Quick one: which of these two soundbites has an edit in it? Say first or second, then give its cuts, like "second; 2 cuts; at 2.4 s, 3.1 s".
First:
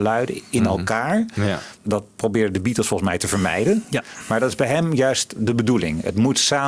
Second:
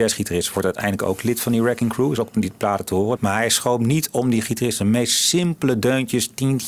second; 2 cuts; at 2.2 s, 3.2 s